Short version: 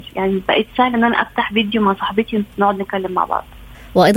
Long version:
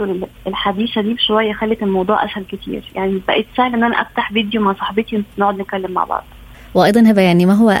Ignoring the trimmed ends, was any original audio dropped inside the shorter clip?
no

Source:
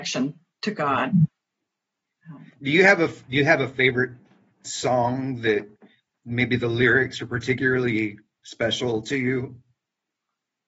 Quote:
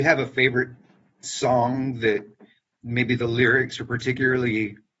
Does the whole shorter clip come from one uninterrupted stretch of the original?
yes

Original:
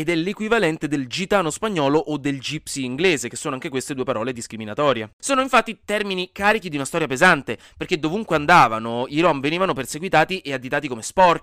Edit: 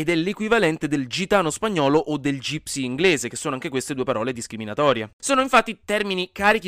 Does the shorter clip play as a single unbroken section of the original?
yes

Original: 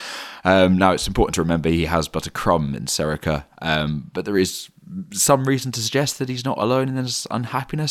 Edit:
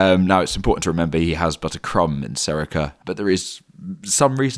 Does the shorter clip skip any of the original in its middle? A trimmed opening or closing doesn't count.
yes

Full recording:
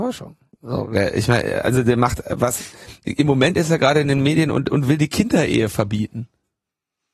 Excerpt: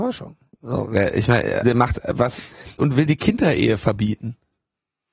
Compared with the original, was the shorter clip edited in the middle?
yes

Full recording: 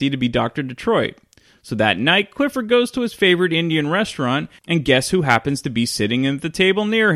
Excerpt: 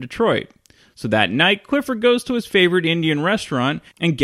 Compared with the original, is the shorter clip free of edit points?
yes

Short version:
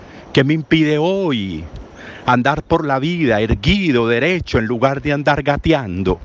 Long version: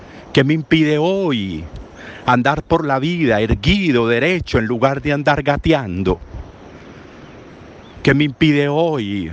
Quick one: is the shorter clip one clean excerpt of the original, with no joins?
yes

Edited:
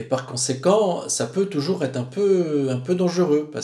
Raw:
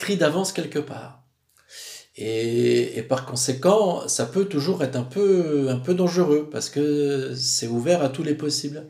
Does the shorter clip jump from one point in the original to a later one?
no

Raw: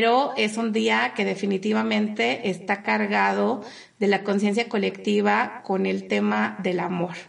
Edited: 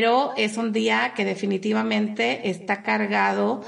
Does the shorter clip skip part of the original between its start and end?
no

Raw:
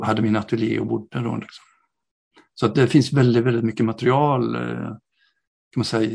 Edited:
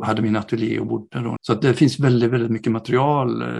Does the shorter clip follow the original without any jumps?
no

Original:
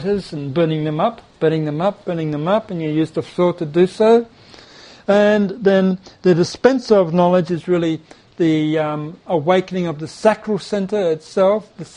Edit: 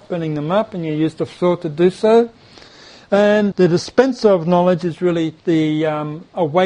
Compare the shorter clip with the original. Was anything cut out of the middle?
yes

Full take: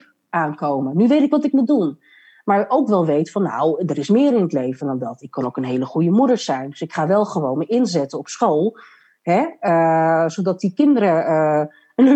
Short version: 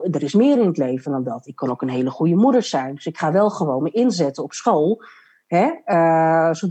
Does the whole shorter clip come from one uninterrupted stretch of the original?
yes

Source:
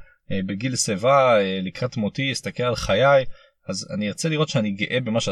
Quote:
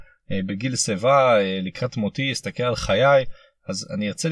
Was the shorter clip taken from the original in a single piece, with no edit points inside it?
yes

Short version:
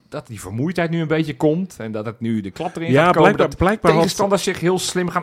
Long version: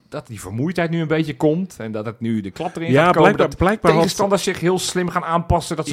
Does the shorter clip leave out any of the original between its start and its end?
no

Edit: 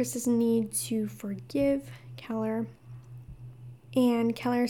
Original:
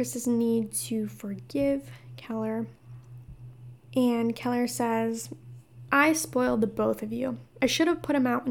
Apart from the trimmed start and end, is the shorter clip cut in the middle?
no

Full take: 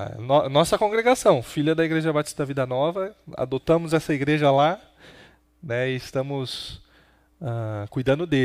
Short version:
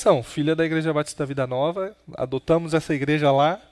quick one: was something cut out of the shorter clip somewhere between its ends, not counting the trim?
no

